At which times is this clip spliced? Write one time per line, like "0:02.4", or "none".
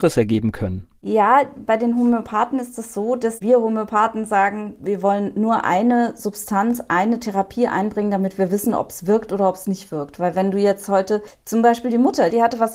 none